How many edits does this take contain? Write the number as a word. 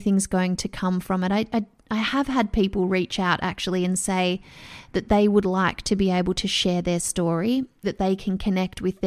one